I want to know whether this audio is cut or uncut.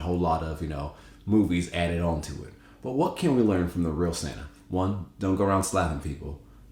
uncut